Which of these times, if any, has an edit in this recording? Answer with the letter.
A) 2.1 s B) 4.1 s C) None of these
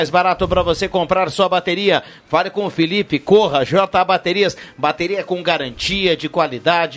C